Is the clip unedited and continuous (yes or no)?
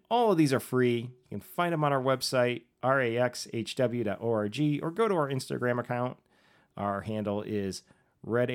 yes